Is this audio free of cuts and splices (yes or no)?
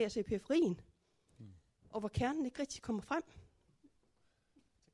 no